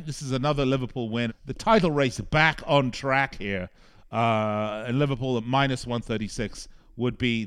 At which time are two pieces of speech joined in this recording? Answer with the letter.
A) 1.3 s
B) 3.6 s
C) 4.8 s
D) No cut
A